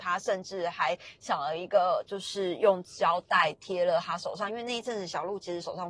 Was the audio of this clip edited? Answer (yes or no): no